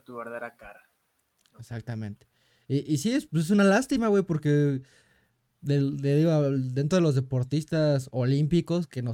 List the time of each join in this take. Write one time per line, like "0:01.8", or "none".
none